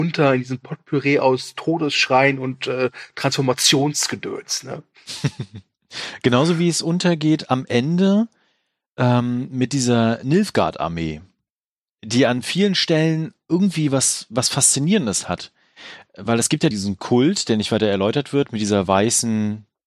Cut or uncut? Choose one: cut